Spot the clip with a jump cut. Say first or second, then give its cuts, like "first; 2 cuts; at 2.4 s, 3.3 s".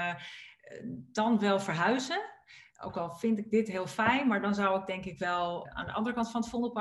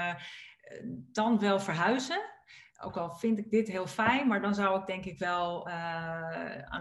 first; 1 cut; at 5.7 s